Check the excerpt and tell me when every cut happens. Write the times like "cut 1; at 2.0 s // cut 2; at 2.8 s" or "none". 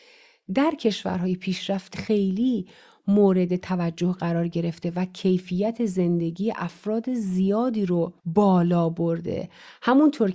cut 1; at 1.9 s // cut 2; at 8.2 s

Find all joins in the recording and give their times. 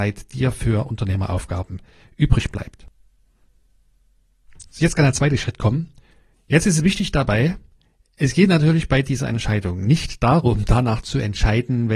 cut 1; at 6.3 s

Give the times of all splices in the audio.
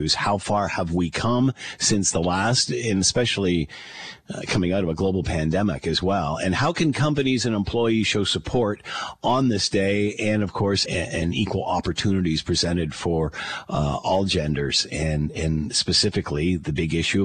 cut 1; at 10.9 s

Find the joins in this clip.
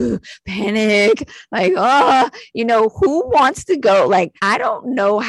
cut 1; at 4.4 s

